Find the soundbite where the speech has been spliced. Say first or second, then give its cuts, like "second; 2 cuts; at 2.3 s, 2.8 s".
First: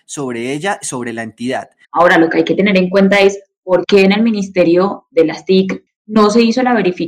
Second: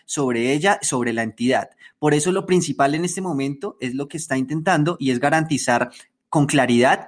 first; 2 cuts; at 1.8 s, 5.9 s